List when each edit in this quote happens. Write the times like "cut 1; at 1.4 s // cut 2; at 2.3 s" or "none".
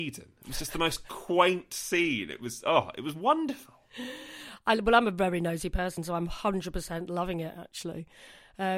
none